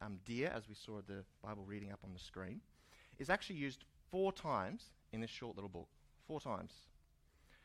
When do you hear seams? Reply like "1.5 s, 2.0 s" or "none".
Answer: none